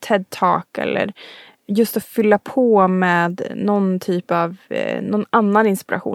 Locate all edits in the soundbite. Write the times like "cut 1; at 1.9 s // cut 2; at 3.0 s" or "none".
none